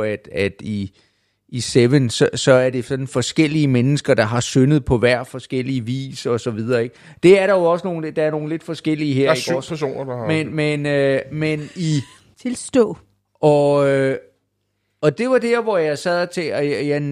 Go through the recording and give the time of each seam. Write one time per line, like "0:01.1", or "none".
0:12.3